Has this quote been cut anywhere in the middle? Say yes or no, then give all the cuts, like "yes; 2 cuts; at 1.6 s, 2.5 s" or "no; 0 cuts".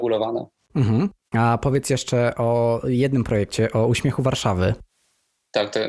yes; 1 cut; at 1.3 s